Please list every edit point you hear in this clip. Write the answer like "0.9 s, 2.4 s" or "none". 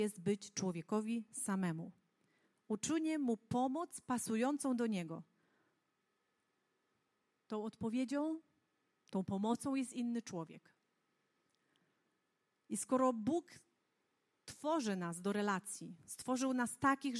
none